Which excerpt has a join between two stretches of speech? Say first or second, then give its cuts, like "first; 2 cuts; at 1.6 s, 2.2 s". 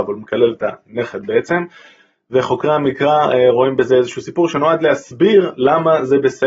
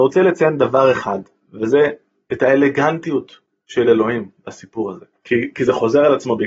second; 1 cut; at 5.3 s